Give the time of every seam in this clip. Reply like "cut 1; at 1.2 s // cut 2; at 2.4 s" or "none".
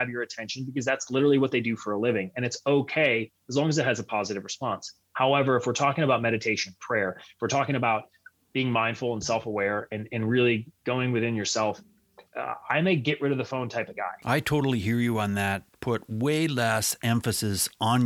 cut 1; at 8.3 s // cut 2; at 12.3 s